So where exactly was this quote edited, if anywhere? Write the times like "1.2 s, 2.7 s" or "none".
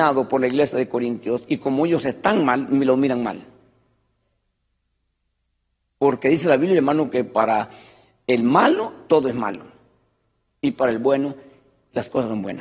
none